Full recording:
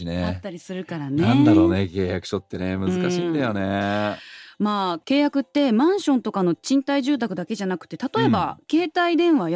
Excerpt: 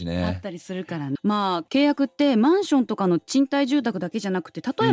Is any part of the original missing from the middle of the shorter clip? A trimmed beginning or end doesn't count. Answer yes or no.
yes